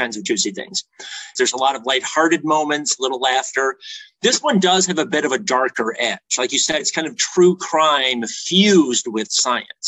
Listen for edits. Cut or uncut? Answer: cut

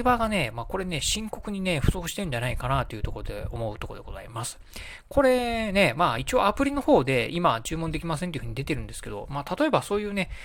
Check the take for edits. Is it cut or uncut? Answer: uncut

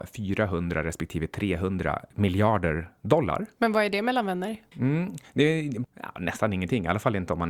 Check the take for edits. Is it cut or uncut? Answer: cut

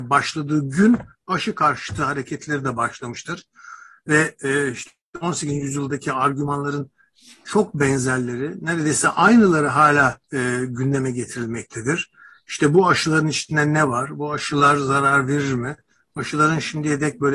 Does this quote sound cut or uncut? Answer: cut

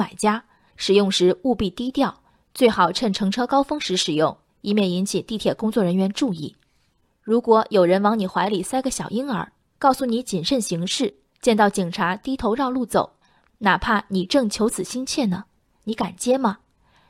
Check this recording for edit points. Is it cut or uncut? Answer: uncut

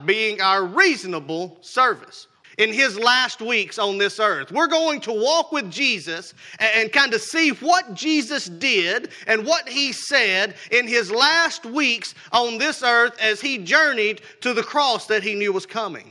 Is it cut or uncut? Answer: cut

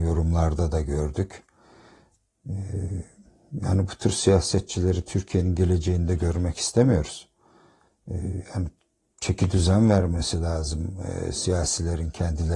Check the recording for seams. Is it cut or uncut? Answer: uncut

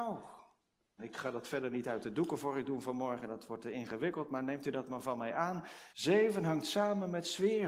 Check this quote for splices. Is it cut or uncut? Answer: cut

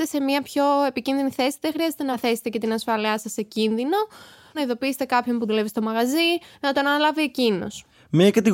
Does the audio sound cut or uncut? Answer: uncut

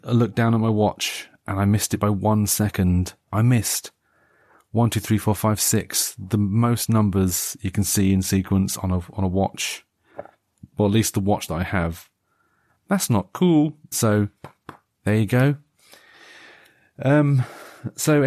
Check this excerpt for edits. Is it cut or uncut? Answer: cut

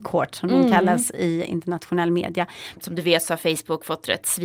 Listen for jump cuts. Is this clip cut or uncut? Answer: cut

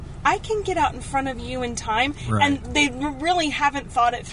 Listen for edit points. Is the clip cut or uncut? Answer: uncut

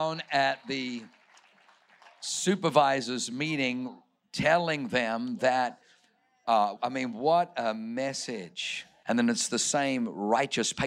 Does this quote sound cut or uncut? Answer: cut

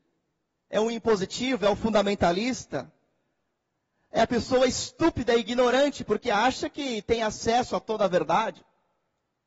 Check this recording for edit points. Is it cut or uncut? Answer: uncut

